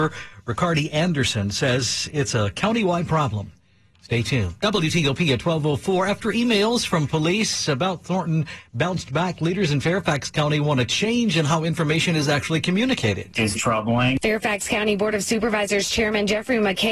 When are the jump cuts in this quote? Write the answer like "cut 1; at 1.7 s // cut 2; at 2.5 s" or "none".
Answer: cut 1; at 13.6 s